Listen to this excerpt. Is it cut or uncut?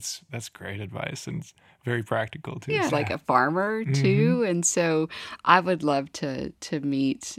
cut